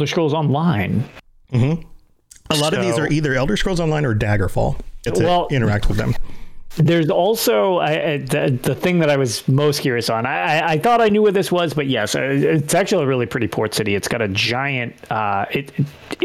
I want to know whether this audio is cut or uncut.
cut